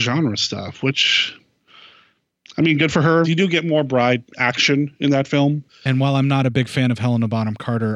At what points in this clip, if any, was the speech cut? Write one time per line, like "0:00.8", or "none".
0:03.2
0:05.7